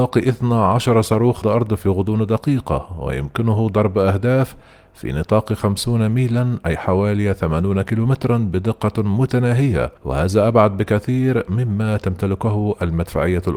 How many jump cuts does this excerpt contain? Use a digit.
2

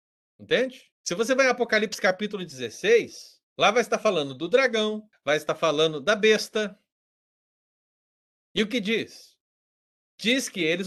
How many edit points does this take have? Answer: 3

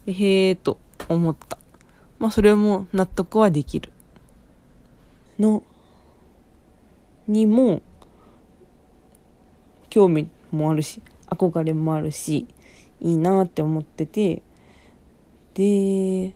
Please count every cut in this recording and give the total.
2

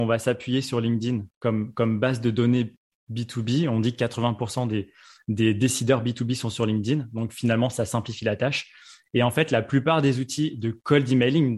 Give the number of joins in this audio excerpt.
0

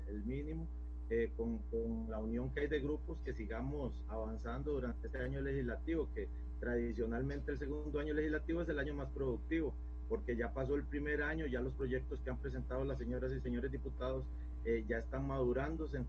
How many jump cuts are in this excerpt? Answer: 0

